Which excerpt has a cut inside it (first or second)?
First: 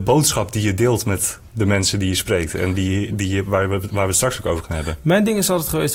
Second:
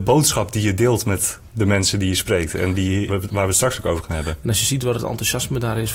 second